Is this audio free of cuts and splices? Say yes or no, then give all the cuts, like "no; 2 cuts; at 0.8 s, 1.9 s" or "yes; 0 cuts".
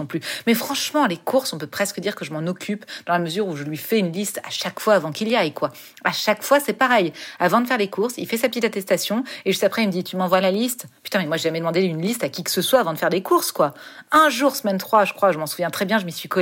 yes; 0 cuts